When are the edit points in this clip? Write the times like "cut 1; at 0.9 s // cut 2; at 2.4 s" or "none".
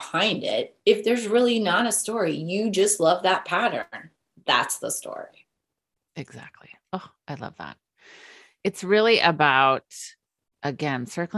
none